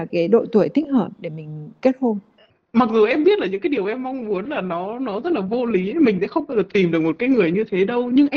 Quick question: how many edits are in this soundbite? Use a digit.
0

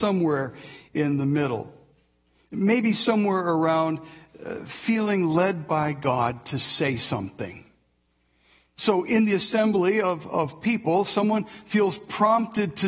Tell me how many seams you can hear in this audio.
0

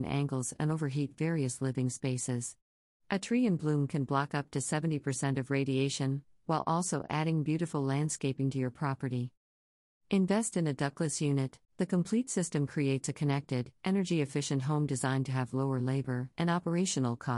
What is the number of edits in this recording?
2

